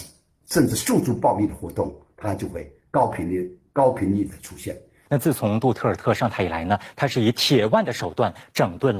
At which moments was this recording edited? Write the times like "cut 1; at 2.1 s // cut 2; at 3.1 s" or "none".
cut 1; at 5.1 s